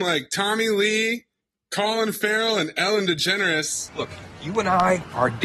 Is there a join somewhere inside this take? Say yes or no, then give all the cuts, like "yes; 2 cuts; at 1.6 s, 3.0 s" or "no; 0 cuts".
no; 0 cuts